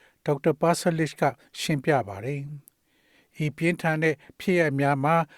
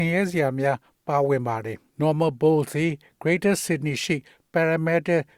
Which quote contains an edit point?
second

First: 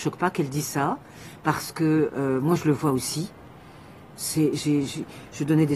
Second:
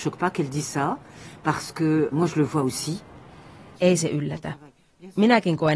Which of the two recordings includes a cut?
second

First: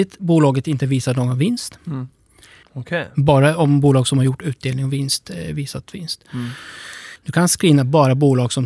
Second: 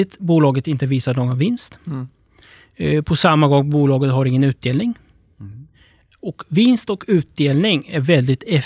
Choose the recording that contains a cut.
first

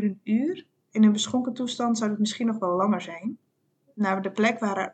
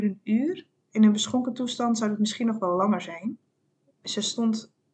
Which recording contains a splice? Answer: second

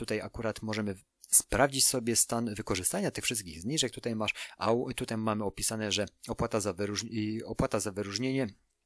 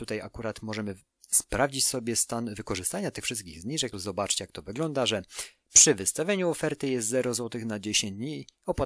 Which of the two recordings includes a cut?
second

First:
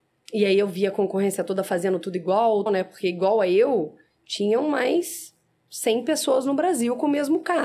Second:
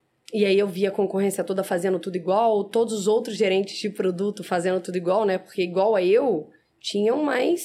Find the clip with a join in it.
first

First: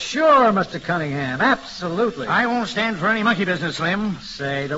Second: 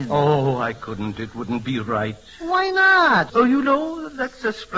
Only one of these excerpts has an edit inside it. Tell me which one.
second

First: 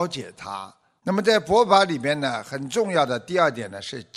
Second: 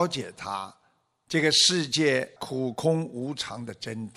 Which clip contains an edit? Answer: first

